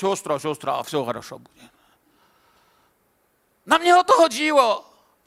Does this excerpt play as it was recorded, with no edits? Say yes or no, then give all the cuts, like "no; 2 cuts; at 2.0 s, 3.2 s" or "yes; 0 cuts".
yes; 0 cuts